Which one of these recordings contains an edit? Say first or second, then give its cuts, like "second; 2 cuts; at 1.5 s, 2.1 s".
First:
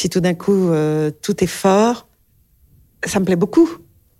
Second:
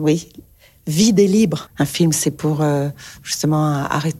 second; 1 cut; at 1.7 s